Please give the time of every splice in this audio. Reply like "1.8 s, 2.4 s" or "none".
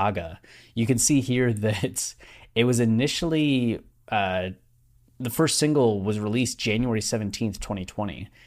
none